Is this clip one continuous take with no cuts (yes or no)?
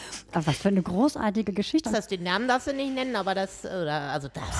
no